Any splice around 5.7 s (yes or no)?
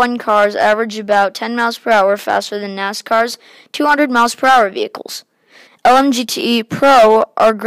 yes